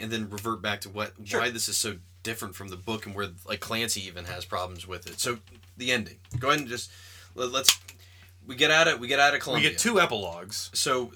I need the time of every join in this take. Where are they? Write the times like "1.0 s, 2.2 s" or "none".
none